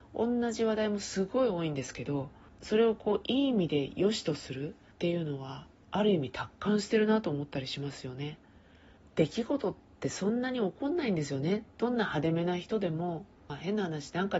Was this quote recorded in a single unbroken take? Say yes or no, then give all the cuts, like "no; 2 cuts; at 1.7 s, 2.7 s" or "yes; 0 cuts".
yes; 0 cuts